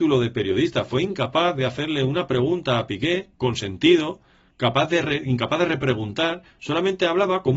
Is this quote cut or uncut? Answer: uncut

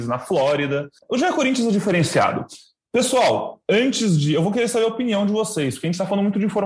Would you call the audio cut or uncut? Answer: uncut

